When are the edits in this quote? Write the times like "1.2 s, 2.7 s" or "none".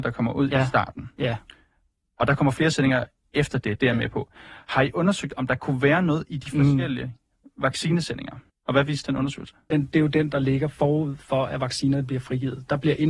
8.5 s, 9.7 s